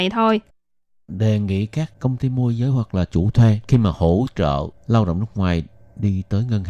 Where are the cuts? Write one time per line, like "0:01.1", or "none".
none